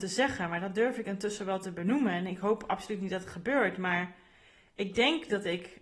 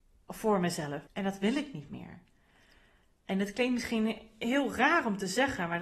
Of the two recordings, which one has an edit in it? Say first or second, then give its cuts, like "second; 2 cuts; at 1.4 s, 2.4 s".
second; 1 cut; at 1.1 s